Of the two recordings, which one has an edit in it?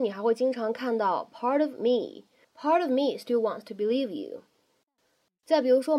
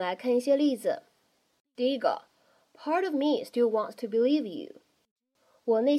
first; 1 cut; at 2.4 s

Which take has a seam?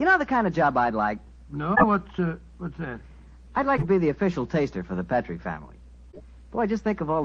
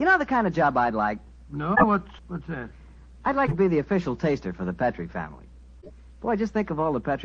second; 1 cut; at 2.2 s

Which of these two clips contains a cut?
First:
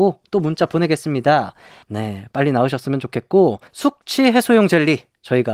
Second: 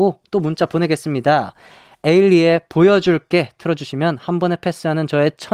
first; 2 cuts; at 1.8 s, 3.7 s

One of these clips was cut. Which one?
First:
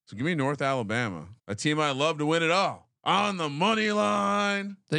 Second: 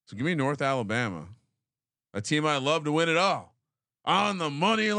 first; 2 cuts; at 1.4 s, 3.0 s

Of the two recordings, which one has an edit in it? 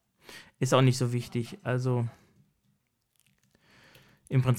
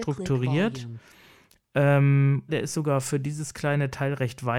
second; 1 cut; at 2.5 s

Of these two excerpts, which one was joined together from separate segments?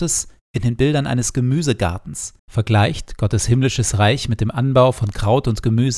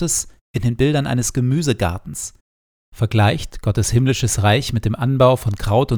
first; 1 cut; at 2.4 s

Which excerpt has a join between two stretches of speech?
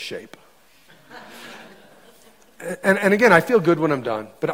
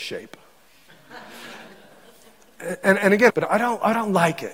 second; 1 cut; at 3.3 s

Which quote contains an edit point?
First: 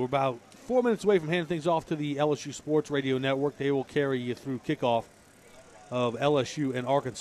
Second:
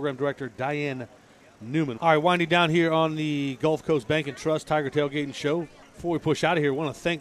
second; 1 cut; at 2.0 s

